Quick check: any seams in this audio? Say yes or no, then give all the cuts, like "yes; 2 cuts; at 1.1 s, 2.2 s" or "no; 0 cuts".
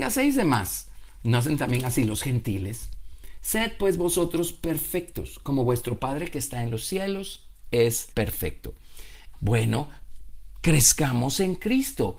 yes; 2 cuts; at 8.1 s, 9.3 s